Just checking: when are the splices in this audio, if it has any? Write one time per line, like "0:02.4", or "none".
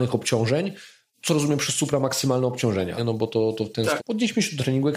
0:03.0
0:04.0